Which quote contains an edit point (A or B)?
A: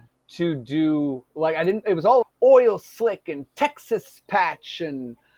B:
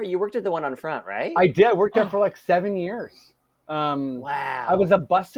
A